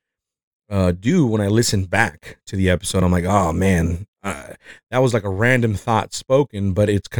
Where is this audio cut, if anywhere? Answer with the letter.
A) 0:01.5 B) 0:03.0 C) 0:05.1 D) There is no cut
D